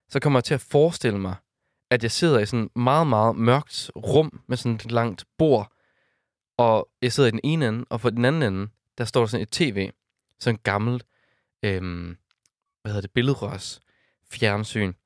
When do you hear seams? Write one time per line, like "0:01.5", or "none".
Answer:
0:04.8